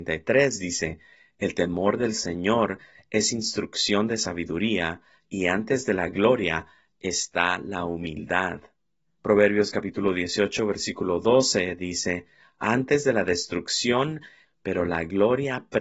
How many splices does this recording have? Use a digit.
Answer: 2